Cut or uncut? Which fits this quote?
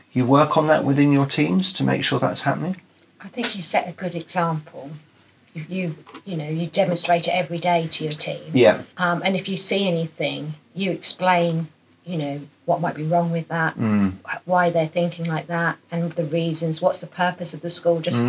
cut